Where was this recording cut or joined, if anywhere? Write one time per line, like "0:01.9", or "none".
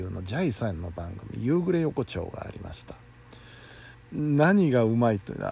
0:03.9